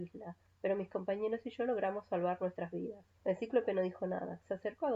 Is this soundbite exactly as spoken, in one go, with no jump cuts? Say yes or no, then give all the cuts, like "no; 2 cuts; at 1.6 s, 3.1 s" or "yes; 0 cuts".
no; 1 cut; at 3.2 s